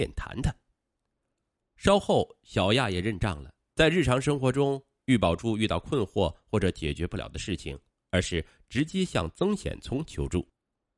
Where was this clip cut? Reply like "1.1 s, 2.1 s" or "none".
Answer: 1.6 s, 3.7 s, 7.9 s